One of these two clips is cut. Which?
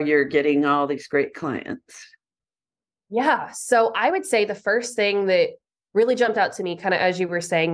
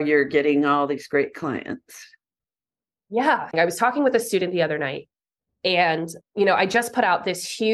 second; 2 cuts; at 3.5 s, 6.2 s

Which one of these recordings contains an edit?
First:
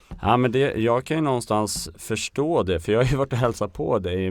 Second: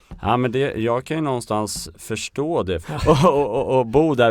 second; 1 cut; at 2.8 s

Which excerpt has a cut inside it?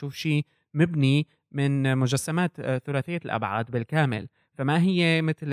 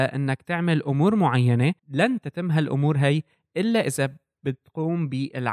second; 1 cut; at 1.8 s

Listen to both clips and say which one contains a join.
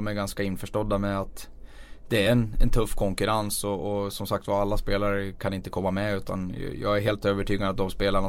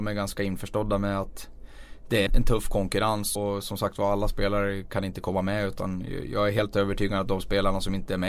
second; 2 cuts; at 2.3 s, 3.4 s

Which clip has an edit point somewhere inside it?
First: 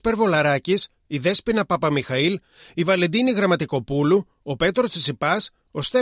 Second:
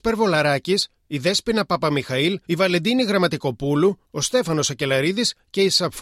second; 2 cuts; at 2.4 s, 4.0 s

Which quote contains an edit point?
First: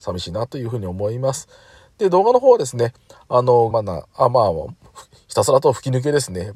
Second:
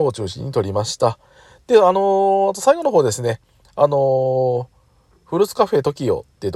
first; 1 cut; at 3.7 s

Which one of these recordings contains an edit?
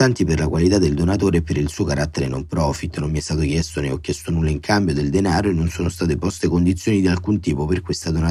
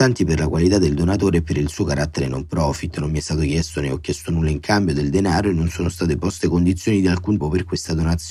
second; 1 cut; at 7.4 s

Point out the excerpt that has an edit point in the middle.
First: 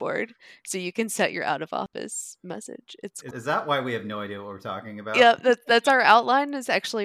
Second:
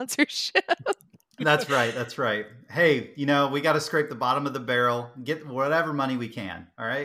first; 1 cut; at 3.3 s

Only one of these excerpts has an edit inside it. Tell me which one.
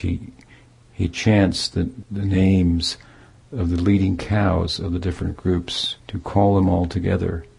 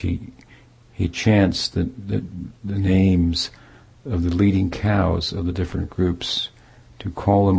first; 2 cuts; at 2.0 s, 6.0 s

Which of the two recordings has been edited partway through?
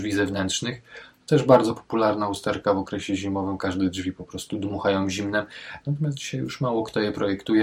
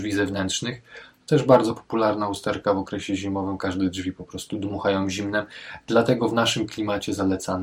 first; 1 cut; at 5.8 s

